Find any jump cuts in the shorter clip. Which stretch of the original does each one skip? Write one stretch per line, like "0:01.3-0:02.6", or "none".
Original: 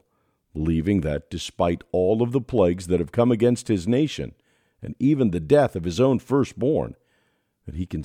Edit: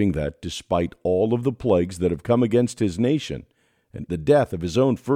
0:05.0-0:05.3